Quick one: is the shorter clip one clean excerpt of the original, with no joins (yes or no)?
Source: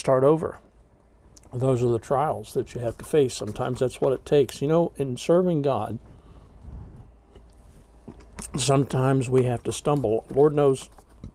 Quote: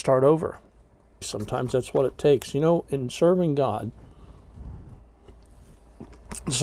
no